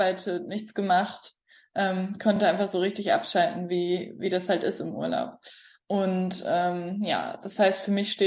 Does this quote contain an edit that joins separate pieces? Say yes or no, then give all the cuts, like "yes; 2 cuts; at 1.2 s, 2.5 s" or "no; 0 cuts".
no; 0 cuts